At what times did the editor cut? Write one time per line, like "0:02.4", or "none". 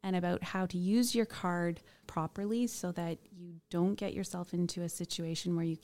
0:02.0